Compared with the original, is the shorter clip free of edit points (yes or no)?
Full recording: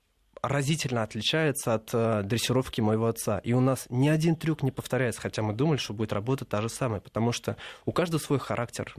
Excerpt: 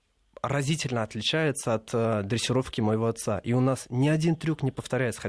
yes